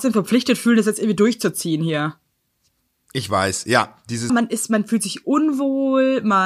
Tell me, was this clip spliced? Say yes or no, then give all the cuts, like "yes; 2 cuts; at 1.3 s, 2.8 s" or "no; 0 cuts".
yes; 1 cut; at 4.3 s